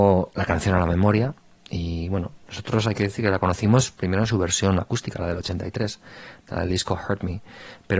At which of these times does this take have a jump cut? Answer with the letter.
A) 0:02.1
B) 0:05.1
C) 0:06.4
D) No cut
D